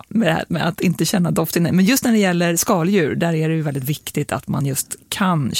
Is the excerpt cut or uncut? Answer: uncut